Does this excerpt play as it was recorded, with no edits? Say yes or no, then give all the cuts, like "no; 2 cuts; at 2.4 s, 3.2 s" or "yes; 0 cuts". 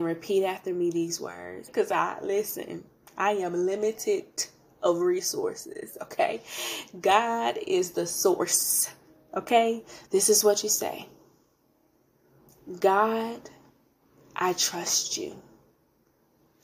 no; 2 cuts; at 1.7 s, 10.1 s